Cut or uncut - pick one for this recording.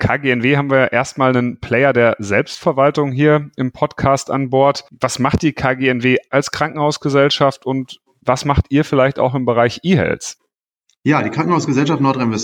cut